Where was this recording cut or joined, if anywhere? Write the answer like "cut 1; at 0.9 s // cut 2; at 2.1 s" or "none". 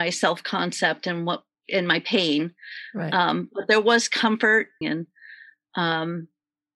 cut 1; at 4.8 s